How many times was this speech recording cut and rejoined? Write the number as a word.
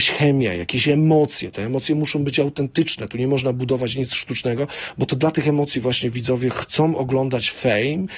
zero